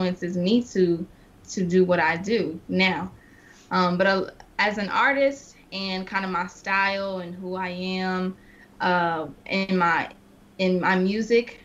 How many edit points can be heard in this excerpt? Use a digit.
0